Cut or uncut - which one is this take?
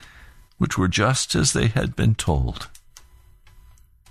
uncut